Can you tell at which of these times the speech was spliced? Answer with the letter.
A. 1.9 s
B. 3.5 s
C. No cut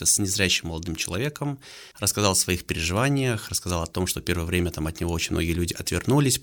A